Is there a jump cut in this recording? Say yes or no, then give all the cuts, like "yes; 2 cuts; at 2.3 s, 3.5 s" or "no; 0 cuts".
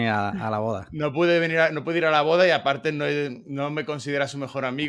no; 0 cuts